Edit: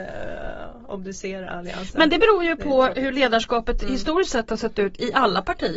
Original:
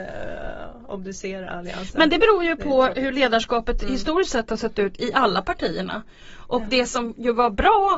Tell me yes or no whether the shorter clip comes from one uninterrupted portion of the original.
yes